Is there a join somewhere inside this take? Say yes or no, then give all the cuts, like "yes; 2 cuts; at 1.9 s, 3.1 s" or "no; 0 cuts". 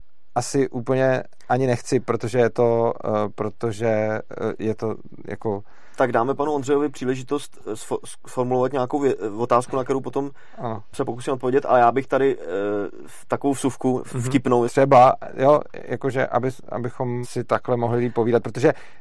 yes; 2 cuts; at 14.7 s, 17.2 s